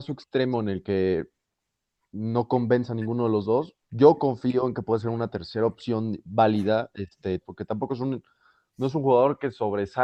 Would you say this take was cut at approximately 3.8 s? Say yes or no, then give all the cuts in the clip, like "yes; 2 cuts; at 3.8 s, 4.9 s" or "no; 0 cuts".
yes; 2 cuts; at 3.8 s, 7.4 s